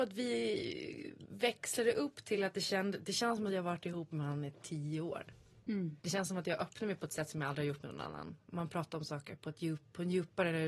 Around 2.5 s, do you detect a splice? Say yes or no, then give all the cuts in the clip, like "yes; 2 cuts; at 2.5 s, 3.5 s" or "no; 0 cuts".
no; 2 cuts; at 6.0 s, 8.4 s